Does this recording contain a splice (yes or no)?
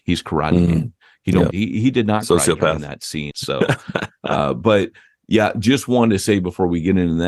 yes